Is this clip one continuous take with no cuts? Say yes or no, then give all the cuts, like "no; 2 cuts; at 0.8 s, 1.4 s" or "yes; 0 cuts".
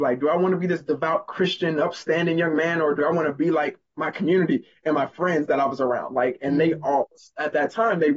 yes; 0 cuts